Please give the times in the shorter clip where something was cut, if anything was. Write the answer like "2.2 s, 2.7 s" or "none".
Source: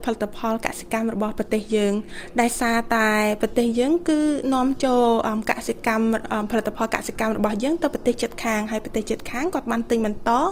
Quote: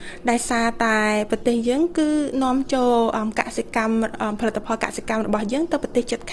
none